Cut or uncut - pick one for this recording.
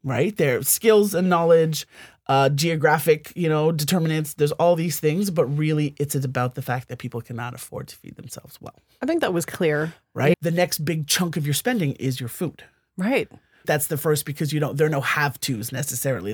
cut